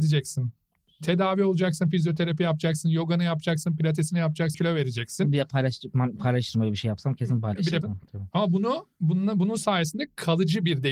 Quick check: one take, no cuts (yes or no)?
no